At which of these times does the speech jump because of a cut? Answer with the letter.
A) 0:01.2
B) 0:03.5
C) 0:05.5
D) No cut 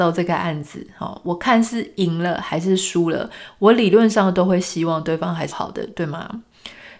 C